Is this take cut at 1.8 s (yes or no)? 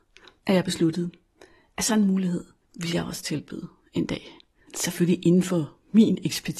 no